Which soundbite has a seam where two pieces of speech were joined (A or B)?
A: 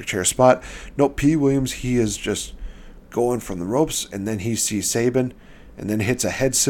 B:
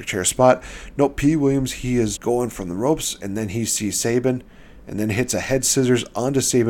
B